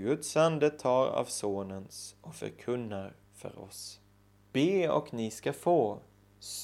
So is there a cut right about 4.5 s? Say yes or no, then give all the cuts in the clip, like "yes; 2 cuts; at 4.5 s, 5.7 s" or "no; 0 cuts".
yes; 1 cut; at 4.5 s